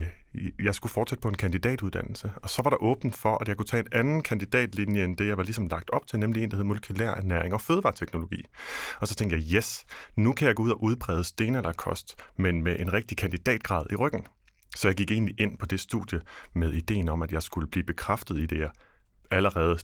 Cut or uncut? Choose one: uncut